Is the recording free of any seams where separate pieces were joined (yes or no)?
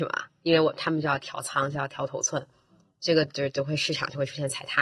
yes